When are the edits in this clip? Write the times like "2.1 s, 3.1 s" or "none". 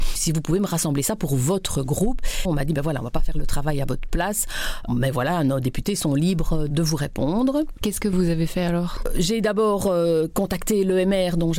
2.5 s